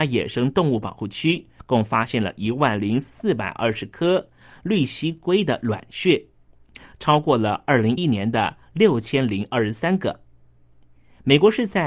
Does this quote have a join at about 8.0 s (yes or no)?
yes